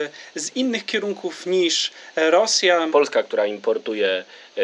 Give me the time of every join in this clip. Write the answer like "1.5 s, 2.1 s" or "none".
2.9 s